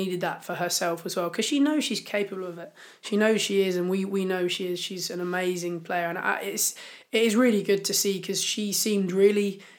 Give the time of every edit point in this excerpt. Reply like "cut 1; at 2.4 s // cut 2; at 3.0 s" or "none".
none